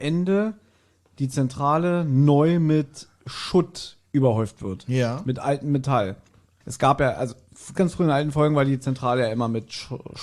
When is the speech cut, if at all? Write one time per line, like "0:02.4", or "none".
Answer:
0:06.6
0:07.7